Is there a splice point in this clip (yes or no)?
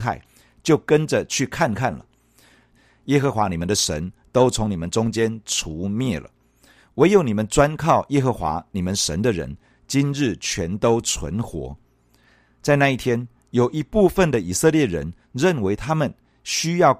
yes